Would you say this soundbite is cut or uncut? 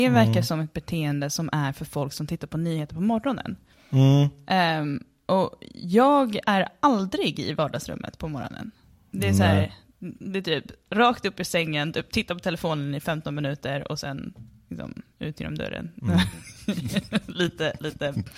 uncut